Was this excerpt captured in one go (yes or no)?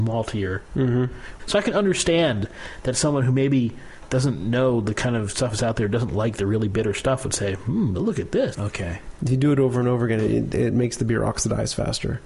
no